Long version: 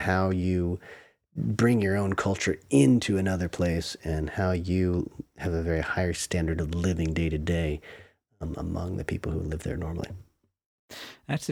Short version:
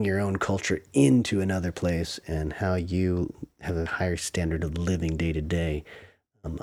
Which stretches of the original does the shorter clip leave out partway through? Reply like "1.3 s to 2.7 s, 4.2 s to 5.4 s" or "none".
5.6 s to 5.8 s